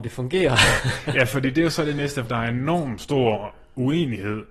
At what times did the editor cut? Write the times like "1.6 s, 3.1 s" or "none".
2.2 s